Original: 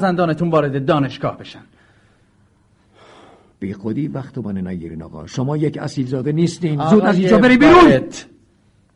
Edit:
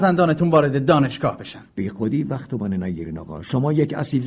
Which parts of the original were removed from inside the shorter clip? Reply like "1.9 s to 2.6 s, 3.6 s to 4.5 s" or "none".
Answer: 1.7 s to 3.5 s